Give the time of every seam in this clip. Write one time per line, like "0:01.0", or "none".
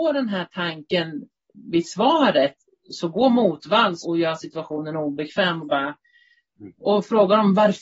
0:04.0

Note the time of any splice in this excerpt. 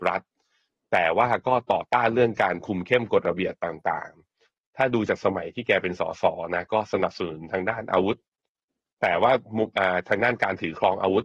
none

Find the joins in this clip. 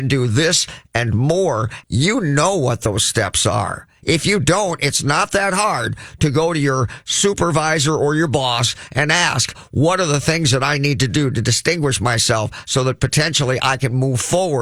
0:01.8

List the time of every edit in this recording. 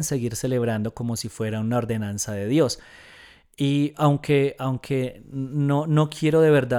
none

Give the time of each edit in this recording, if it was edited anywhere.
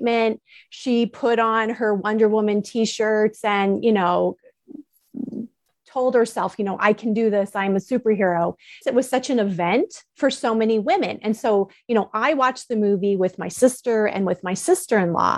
0:08.8

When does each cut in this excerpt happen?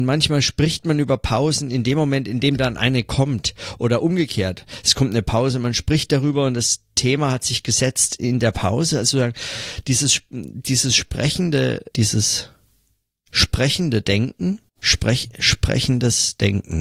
0:11.9
0:14.7

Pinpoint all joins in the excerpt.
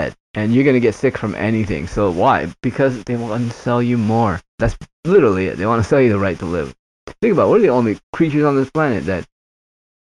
0:04.5
0:08.0

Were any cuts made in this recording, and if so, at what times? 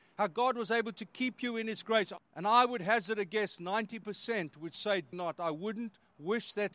0:02.2
0:05.1

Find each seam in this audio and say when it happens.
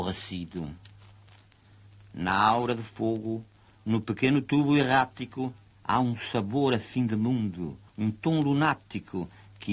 0:05.7
0:07.9

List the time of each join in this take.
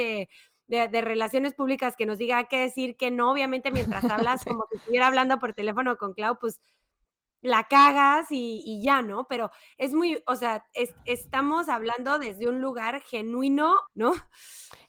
0:13.9

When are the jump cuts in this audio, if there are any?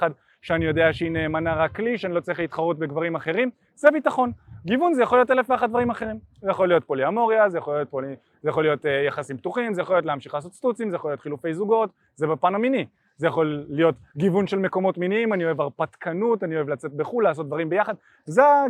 none

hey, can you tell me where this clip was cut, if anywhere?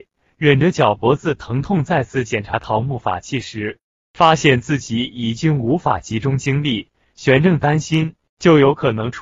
0:08.3

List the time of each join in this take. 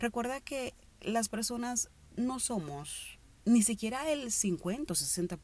0:03.4

